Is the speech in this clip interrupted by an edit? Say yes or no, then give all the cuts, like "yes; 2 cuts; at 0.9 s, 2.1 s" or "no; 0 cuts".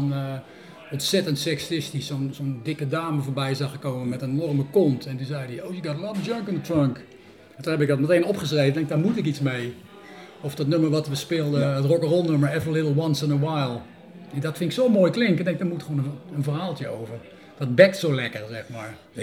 no; 0 cuts